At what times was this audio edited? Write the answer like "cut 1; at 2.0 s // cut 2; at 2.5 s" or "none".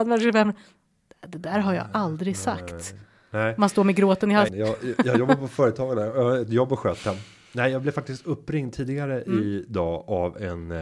cut 1; at 4.5 s